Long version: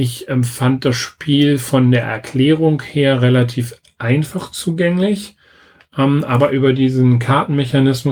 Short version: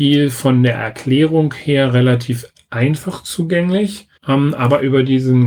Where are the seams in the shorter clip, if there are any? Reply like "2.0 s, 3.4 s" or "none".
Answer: 4.2 s